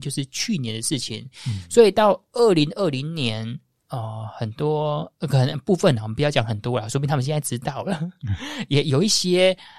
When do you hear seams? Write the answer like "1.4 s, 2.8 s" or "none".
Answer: none